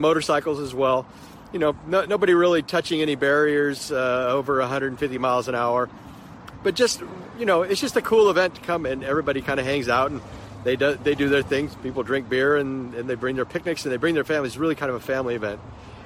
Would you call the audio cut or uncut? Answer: uncut